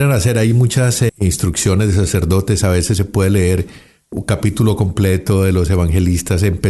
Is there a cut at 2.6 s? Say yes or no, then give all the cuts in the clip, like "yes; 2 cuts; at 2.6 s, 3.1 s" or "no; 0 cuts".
no; 1 cut; at 1.1 s